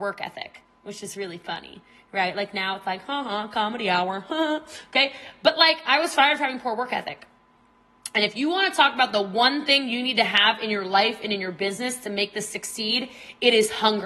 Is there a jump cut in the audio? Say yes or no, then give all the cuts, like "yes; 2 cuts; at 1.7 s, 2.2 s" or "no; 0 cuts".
no; 0 cuts